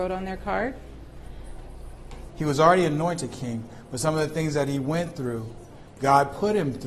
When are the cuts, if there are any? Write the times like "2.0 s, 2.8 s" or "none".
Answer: 2.3 s